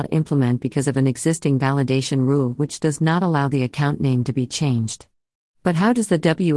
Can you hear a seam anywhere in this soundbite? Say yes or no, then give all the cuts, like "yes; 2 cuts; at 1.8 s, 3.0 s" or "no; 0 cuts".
no; 0 cuts